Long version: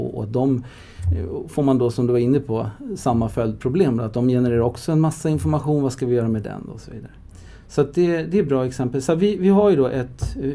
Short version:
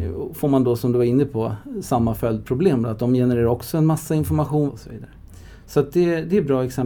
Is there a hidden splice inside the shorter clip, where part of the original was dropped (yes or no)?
yes